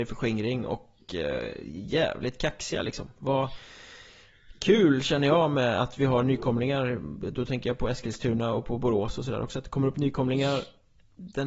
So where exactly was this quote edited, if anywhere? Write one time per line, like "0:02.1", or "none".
none